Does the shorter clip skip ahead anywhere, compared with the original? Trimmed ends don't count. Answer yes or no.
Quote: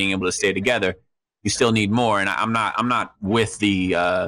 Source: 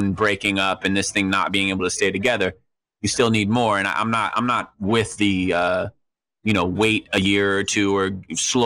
no